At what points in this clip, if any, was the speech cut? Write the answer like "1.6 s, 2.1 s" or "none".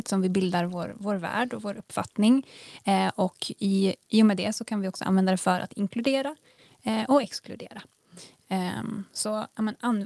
none